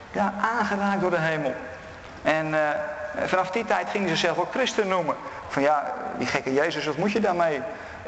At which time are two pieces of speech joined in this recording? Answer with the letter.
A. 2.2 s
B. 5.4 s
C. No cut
B